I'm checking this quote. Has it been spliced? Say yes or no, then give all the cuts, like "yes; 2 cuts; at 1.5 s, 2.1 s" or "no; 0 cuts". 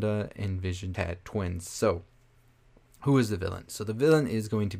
yes; 1 cut; at 0.9 s